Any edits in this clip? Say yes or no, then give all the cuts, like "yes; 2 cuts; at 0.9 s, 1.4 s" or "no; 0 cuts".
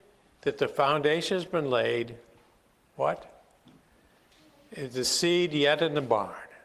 no; 0 cuts